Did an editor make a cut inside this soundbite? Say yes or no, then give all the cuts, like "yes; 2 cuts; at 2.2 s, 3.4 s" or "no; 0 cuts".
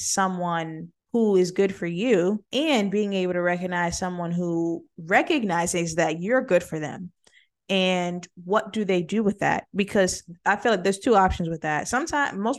yes; 2 cuts; at 1.0 s, 2.5 s